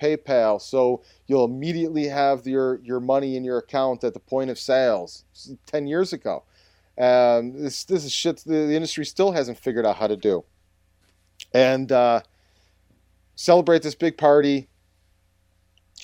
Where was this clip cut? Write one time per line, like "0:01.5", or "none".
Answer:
none